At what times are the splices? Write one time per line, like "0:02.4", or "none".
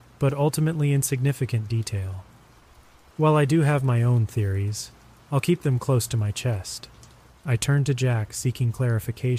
0:07.3

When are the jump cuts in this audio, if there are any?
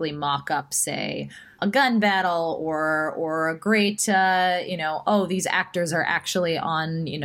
0:01.6

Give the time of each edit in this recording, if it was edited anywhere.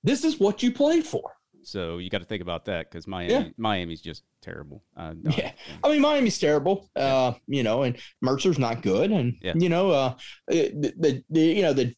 0:01.6

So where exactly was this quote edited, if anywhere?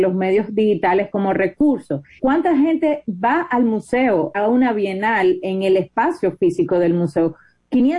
0:02.2
0:04.3

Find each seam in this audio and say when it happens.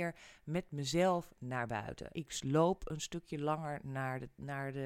0:02.1

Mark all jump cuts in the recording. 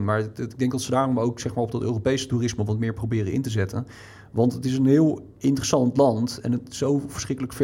none

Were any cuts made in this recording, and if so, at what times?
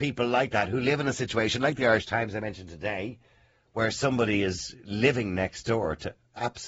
none

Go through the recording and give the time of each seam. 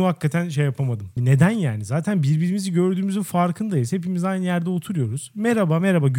0:01.2

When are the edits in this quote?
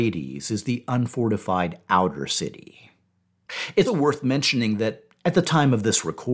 0:03.9

